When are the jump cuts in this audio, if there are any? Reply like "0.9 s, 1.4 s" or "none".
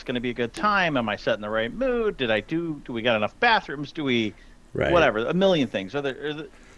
none